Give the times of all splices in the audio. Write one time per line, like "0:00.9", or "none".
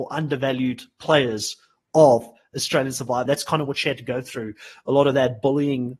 0:03.3